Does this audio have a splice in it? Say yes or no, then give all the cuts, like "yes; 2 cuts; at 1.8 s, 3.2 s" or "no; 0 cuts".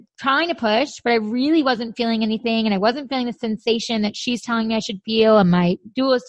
no; 0 cuts